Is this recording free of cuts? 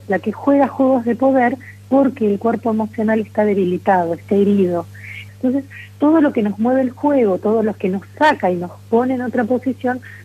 no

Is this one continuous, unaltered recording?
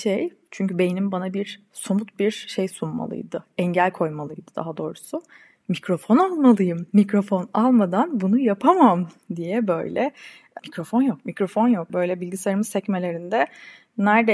no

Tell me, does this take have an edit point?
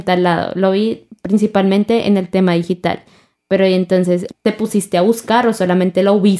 yes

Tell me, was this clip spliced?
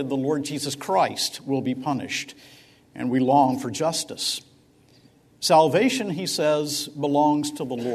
no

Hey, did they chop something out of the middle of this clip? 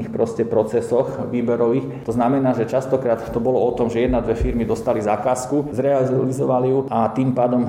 no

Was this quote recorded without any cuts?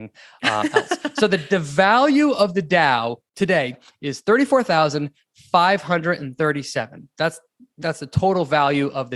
yes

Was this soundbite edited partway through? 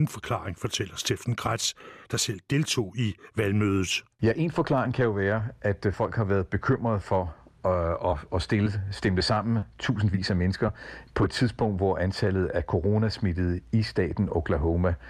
no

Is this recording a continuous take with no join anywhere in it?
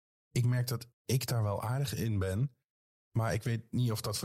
no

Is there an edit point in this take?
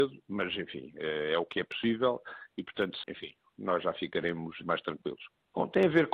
yes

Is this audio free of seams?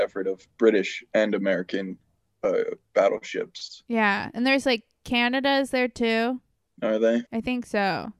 no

